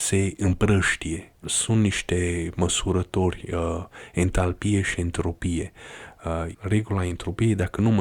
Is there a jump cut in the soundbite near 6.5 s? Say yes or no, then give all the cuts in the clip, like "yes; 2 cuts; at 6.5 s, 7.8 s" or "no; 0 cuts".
yes; 2 cuts; at 1.4 s, 6.5 s